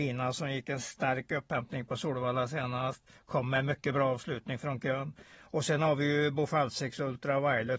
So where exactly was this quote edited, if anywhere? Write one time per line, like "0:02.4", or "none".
none